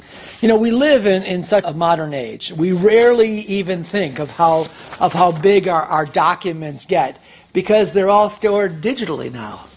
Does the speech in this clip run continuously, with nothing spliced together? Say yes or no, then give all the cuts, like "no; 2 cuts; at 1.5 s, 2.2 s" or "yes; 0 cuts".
no; 1 cut; at 1.6 s